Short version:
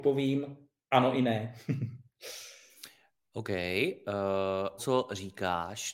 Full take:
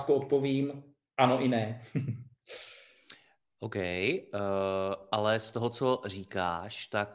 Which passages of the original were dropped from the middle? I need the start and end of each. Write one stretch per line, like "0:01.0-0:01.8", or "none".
0:05.0-0:05.7